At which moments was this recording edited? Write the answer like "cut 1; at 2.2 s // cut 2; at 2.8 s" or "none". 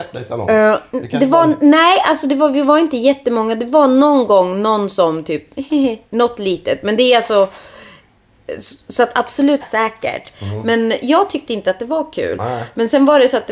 cut 1; at 9.6 s

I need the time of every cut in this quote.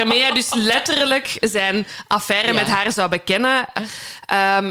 cut 1; at 3.8 s

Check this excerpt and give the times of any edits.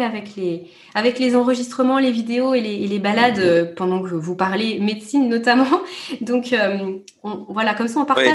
none

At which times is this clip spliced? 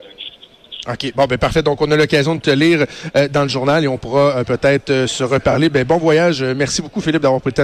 none

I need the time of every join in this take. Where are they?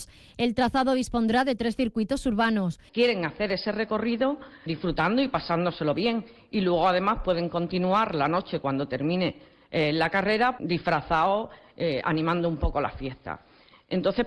cut 1; at 2.9 s // cut 2; at 4.7 s // cut 3; at 10.6 s

